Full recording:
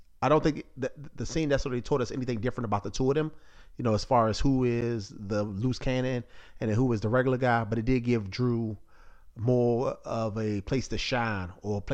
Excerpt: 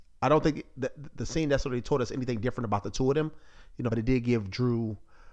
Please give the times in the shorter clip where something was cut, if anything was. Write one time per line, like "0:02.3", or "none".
0:03.9